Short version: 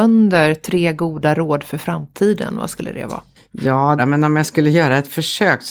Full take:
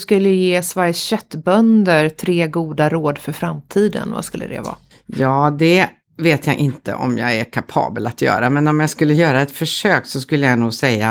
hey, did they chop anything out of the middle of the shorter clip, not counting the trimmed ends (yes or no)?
yes